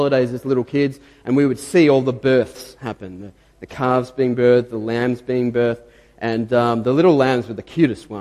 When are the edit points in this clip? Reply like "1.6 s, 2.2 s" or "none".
none